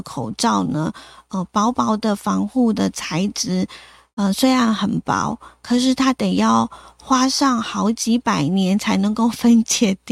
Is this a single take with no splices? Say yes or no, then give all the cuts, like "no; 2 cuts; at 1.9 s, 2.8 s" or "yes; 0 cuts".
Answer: yes; 0 cuts